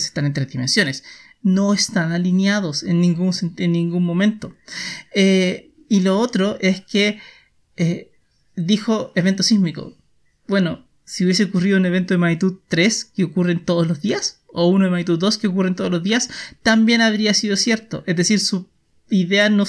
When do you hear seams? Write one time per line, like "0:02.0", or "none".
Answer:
none